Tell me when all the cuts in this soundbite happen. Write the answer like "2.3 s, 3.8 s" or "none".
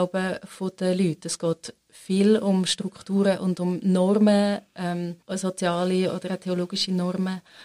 5.2 s